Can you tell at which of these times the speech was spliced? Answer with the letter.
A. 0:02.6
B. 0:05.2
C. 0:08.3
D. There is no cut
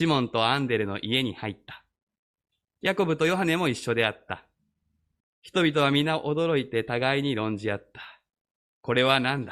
B